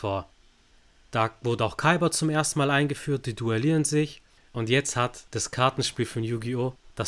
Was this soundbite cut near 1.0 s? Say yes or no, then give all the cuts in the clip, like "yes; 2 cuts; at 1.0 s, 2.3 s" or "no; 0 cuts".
no; 1 cut; at 4.5 s